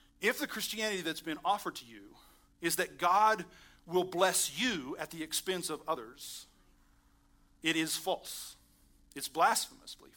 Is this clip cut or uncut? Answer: uncut